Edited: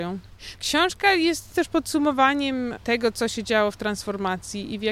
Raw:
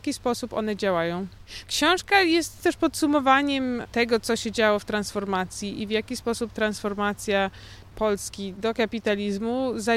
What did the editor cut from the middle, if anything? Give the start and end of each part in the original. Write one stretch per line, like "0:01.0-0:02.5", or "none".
none